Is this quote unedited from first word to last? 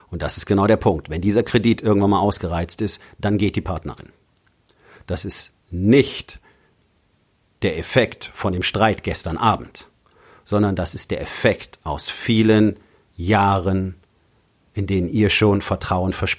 yes; 0 cuts

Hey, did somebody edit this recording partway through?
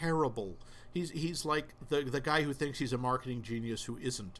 no; 0 cuts

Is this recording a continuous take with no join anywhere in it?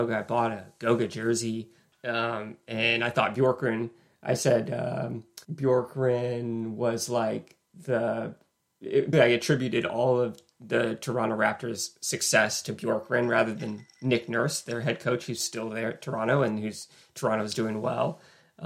no; 3 cuts; at 1.9 s, 5.4 s, 9.1 s

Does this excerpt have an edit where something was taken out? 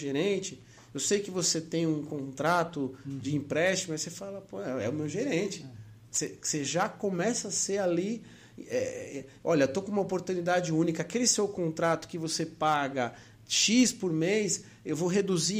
no; 0 cuts

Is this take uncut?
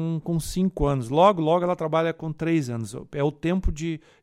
yes; 0 cuts

